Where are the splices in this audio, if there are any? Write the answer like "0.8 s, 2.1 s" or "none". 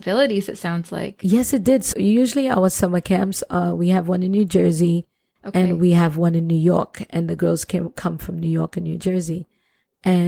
1.9 s